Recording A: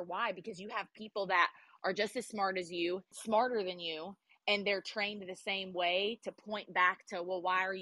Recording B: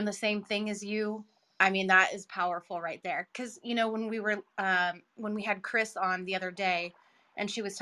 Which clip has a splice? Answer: A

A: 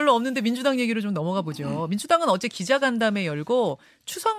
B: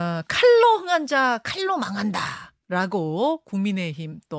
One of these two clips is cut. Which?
B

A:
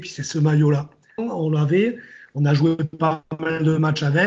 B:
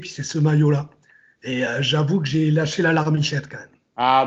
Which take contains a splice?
A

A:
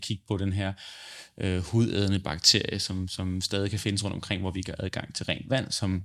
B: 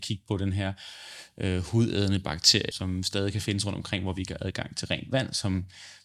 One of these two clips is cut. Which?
B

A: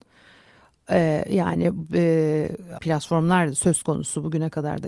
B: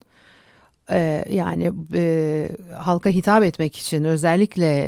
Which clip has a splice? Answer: A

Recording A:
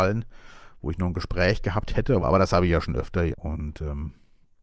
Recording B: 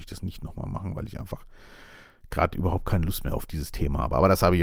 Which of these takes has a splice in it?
A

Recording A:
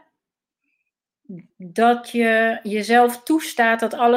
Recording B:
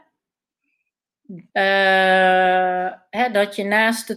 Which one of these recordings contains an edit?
B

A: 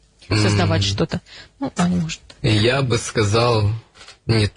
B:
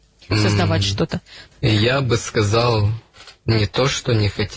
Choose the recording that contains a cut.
B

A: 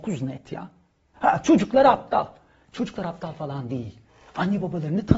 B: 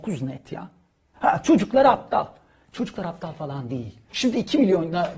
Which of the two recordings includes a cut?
B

